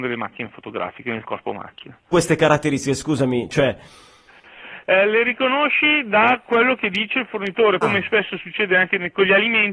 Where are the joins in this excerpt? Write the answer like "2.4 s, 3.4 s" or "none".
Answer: 2.1 s, 7.8 s